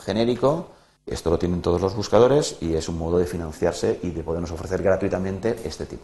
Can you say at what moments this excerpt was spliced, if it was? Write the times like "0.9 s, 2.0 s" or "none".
1.0 s